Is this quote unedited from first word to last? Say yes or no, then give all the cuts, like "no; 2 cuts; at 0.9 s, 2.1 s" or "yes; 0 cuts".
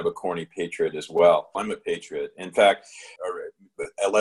no; 2 cuts; at 1.5 s, 3.2 s